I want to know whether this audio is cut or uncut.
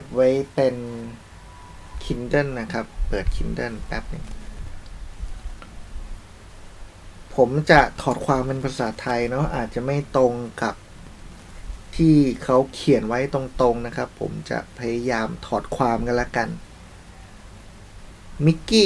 uncut